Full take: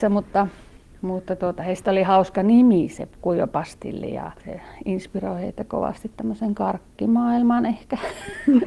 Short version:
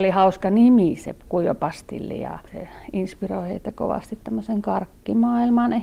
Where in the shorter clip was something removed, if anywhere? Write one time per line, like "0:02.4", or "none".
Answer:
none

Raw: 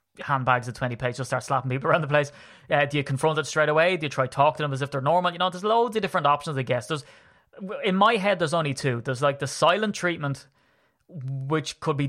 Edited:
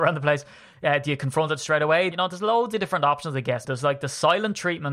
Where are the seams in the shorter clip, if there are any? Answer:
0:02.1
0:03.6

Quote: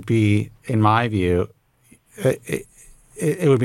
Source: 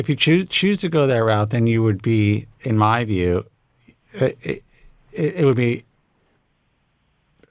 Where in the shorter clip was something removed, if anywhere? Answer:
none

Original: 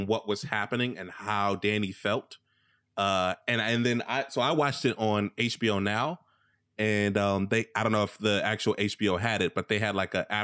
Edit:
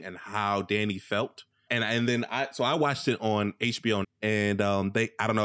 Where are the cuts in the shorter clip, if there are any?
0:01.7
0:04.0

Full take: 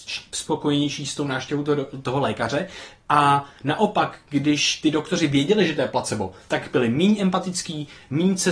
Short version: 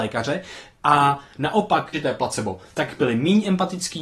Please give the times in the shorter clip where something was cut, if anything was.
0:01.9

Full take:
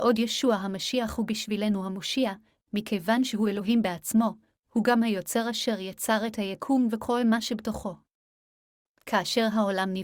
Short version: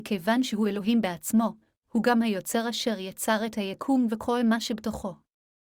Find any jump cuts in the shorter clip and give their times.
none

